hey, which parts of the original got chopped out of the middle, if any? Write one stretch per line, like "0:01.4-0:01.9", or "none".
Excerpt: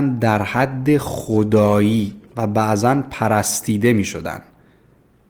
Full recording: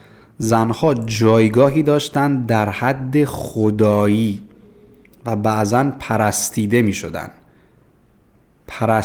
0:04.5-0:05.2